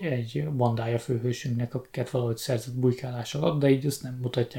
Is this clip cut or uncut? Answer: uncut